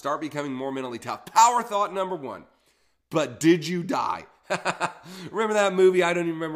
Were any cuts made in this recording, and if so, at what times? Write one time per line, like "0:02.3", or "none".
none